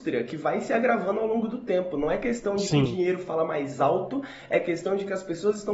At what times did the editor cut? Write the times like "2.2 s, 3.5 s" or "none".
none